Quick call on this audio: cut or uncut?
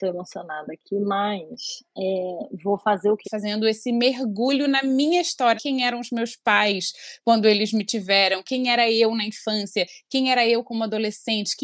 cut